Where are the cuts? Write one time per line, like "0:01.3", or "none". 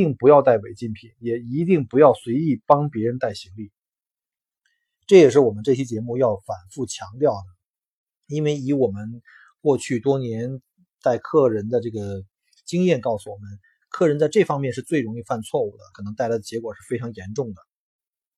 0:15.9

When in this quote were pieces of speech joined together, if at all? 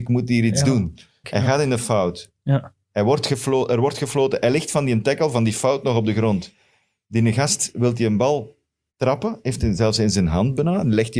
0:01.2

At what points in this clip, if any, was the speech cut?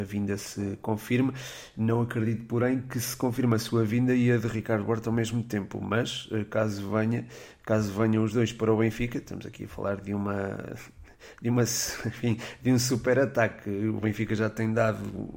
none

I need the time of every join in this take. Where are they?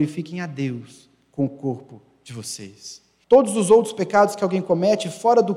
0:03.2

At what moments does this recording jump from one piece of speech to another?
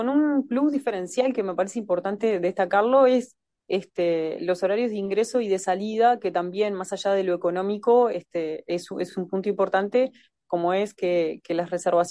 none

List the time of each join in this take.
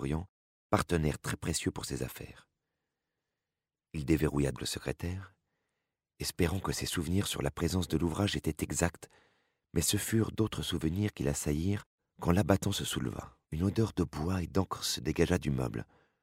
0:04.5
0:13.4

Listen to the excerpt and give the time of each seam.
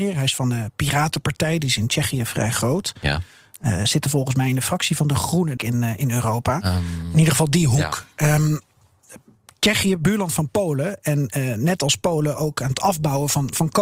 0:05.6

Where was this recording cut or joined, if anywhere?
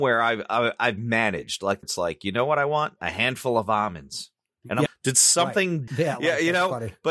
0:01.8
0:04.9
0:05.9

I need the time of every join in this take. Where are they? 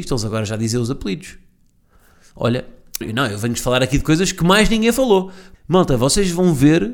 0:03.0
0:05.5

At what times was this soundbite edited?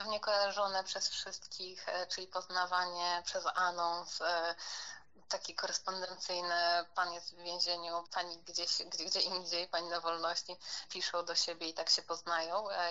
0:08.0
0:10.8

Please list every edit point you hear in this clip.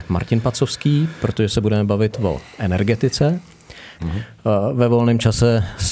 0:04.0

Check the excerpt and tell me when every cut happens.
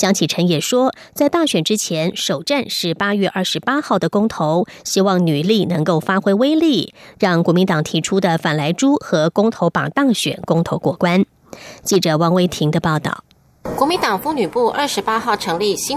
none

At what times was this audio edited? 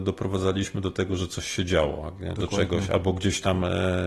0:02.3

